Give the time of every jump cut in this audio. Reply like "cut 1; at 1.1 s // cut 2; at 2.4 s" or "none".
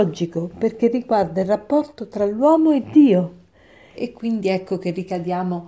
cut 1; at 3.9 s